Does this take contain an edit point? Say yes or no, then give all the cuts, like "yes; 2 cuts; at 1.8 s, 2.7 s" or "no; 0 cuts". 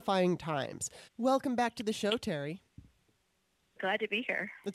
yes; 2 cuts; at 1.1 s, 3.8 s